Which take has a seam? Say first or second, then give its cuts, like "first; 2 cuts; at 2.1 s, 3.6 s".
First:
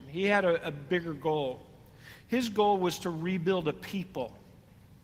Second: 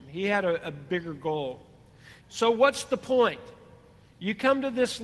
second; 1 cut; at 2.2 s